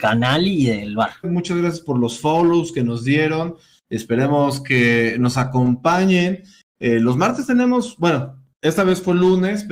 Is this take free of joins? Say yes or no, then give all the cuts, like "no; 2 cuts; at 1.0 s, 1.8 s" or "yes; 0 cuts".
no; 1 cut; at 1.2 s